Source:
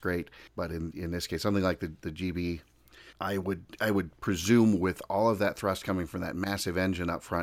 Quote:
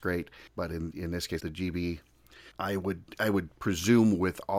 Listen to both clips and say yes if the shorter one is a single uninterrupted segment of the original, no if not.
no